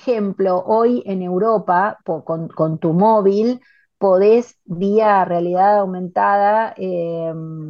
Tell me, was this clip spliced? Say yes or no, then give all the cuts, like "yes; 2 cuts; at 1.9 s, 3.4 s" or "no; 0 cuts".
yes; 1 cut; at 2.0 s